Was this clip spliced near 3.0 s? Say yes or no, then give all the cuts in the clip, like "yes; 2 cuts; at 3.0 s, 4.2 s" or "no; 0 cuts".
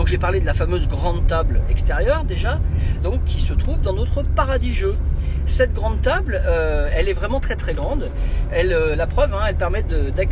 yes; 1 cut; at 3.0 s